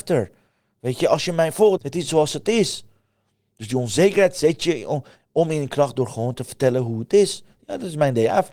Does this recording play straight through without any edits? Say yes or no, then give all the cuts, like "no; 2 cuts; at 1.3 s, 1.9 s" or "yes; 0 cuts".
no; 1 cut; at 1.8 s